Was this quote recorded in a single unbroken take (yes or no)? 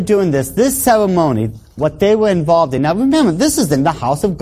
yes